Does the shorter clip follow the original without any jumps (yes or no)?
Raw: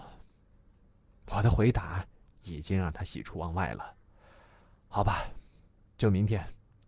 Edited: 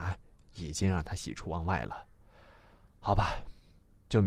yes